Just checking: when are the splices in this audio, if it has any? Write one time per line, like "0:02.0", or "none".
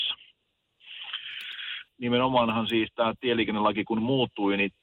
0:01.9